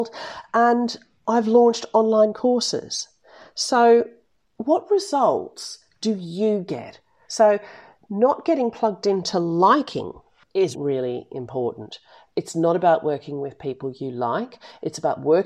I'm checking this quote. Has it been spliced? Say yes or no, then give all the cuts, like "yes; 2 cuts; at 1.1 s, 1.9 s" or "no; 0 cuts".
yes; 2 cuts; at 7.2 s, 10.7 s